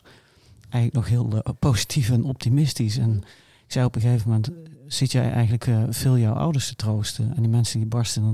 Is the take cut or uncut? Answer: uncut